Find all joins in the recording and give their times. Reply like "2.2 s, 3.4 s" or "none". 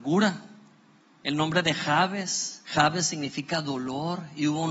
1.2 s, 2.6 s

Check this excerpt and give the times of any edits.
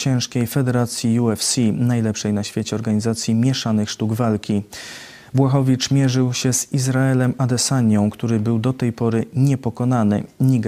none

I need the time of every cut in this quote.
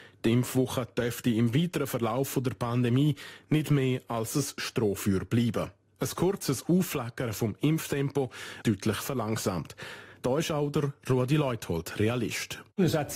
8.6 s

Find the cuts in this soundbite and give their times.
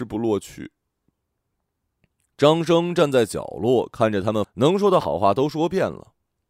4.4 s

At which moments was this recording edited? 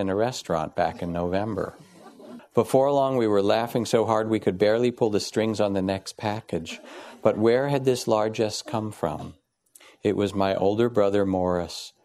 2.4 s

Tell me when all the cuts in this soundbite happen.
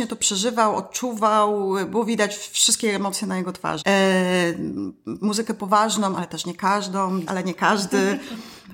3.8 s, 7.3 s

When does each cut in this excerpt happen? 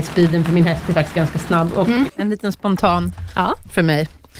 2.1 s

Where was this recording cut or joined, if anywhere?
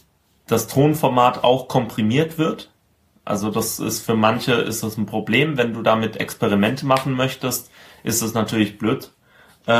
none

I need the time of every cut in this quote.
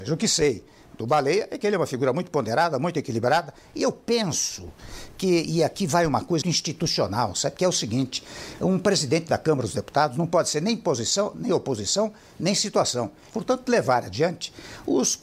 6.4 s, 13.3 s

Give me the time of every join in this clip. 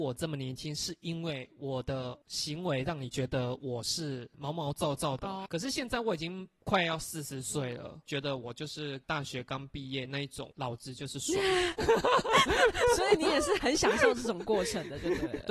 5.5 s

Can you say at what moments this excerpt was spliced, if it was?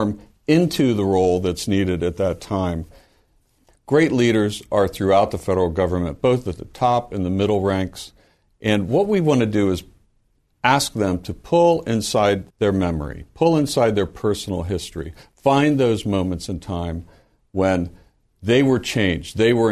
3.7 s, 12.5 s

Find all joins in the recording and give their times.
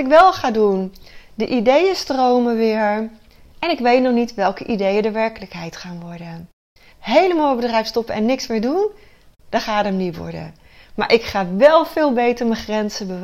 6.9 s

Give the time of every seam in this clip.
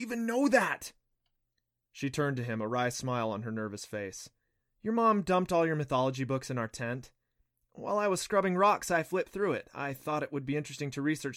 none

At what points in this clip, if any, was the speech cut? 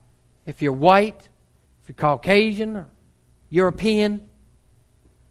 1.6 s

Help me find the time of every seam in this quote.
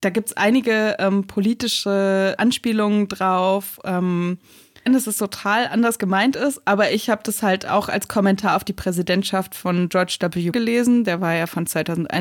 2.4 s, 4.9 s, 10.5 s

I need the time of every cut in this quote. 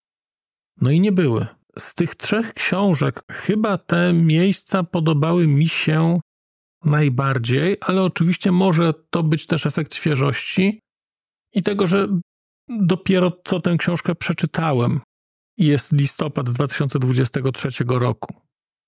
1.6 s, 3.2 s

